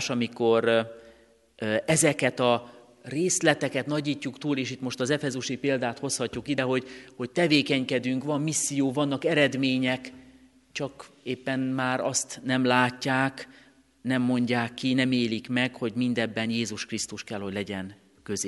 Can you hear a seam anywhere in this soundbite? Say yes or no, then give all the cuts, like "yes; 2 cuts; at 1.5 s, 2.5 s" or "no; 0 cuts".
no; 0 cuts